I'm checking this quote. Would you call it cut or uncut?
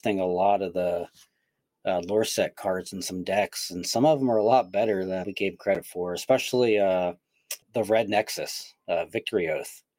cut